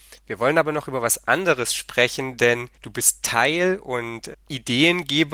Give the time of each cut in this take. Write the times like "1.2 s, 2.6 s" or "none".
2.7 s, 4.3 s